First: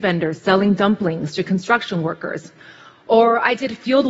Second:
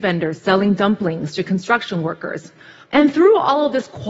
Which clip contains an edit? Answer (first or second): second